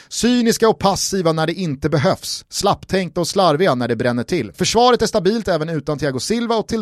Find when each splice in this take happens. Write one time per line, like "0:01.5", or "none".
0:04.5